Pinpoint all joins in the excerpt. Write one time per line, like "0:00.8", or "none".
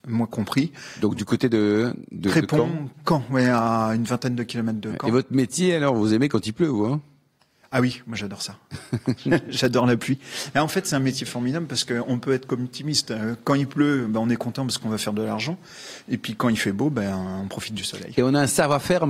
none